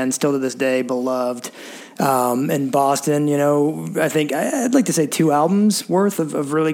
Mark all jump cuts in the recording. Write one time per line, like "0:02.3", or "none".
none